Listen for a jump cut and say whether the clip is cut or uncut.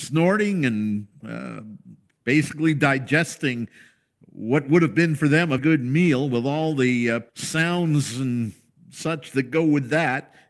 cut